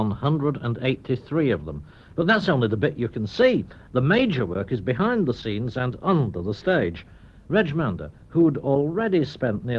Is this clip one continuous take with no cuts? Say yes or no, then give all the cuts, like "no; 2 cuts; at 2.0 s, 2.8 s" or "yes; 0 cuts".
yes; 0 cuts